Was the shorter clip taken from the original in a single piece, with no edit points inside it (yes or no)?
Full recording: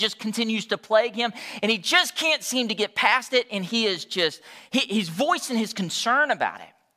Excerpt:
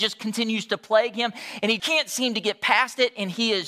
no